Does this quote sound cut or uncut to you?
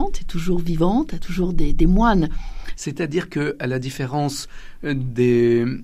cut